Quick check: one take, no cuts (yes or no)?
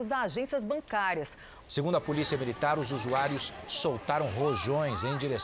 no